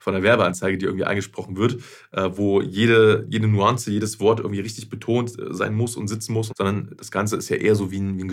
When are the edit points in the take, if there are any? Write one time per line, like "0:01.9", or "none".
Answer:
0:06.5